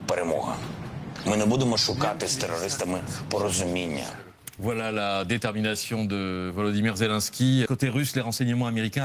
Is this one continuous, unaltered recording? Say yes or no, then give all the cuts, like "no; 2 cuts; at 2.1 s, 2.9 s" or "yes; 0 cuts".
no; 1 cut; at 7.7 s